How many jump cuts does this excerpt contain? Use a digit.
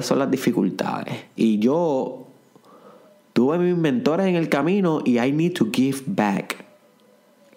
1